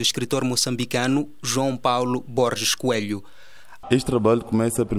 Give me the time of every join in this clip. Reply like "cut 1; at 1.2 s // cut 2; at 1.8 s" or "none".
cut 1; at 3.8 s